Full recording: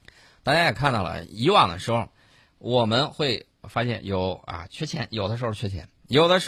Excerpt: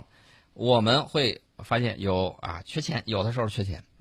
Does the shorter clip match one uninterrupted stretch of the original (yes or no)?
yes